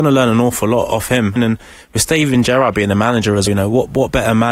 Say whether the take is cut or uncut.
cut